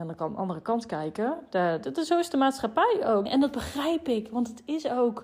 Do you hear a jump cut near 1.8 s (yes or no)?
yes